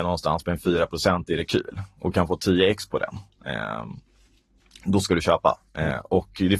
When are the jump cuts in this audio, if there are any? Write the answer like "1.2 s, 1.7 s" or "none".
none